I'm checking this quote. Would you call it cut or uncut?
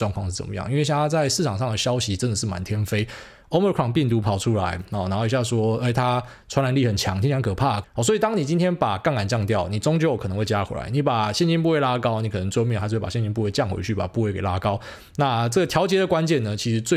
cut